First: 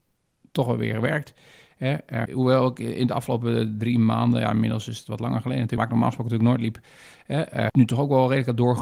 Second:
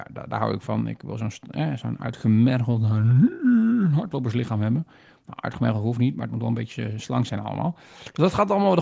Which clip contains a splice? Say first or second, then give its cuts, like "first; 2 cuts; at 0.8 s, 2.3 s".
first; 3 cuts; at 2.3 s, 5.8 s, 7.7 s